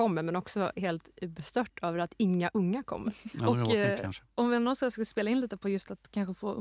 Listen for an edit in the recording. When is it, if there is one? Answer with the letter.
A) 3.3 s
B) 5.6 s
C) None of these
A